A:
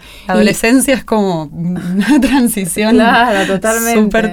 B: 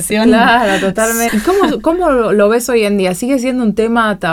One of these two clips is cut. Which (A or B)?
B